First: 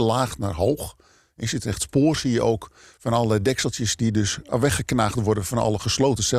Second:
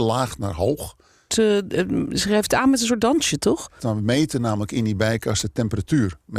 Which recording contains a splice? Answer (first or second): second